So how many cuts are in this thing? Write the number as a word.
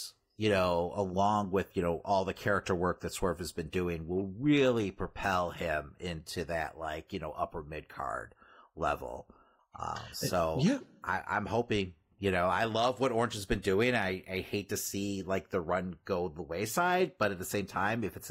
one